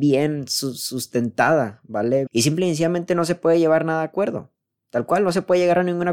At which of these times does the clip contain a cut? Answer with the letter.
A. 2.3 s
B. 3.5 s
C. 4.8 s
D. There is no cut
A